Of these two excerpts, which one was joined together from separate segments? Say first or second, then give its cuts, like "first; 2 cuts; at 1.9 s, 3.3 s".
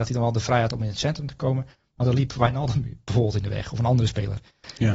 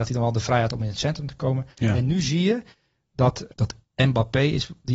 second; 2 cuts; at 1.8 s, 3.5 s